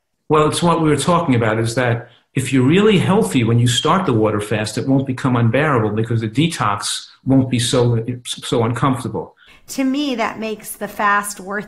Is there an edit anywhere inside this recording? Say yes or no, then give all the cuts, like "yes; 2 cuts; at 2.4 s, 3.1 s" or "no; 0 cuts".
yes; 1 cut; at 9.5 s